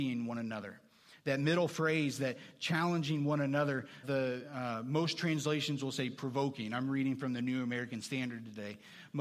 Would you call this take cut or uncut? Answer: cut